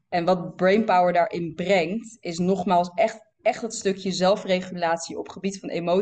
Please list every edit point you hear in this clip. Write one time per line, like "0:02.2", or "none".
none

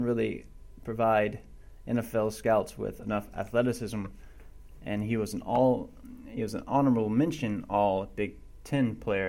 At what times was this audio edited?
none

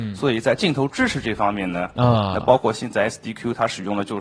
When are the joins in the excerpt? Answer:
0:02.0

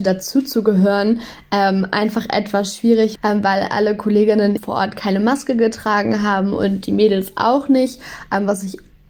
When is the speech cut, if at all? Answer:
0:03.2
0:04.6

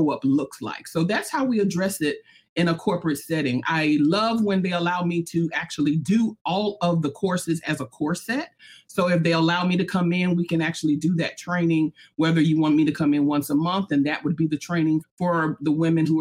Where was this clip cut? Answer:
0:15.0

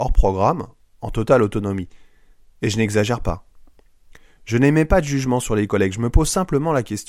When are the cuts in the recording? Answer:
none

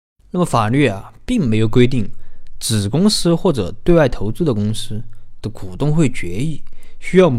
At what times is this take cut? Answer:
none

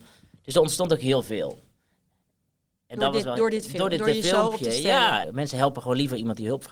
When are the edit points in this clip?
0:05.2

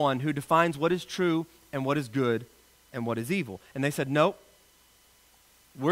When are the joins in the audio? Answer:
none

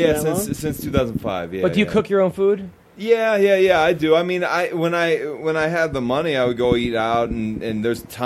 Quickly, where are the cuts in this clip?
none

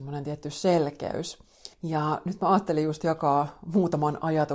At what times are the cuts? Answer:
0:01.7

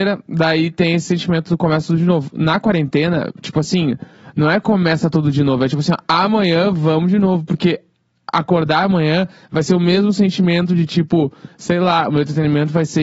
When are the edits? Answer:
none

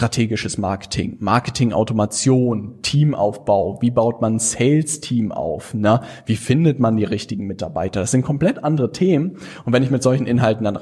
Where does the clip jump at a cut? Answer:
none

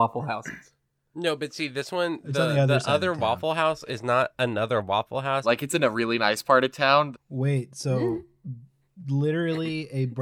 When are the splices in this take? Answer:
0:05.4
0:07.1

